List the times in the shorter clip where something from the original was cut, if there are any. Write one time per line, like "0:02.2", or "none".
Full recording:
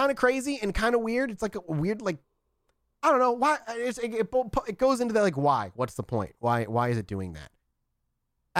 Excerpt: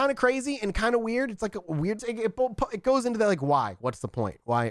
0:02.0